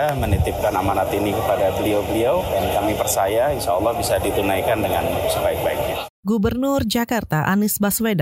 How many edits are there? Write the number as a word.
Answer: zero